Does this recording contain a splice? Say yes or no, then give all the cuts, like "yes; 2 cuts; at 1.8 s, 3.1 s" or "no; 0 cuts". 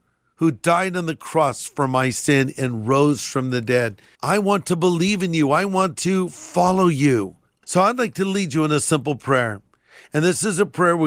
yes; 2 cuts; at 4.2 s, 7.6 s